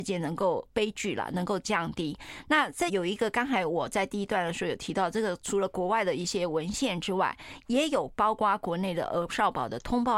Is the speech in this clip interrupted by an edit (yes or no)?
yes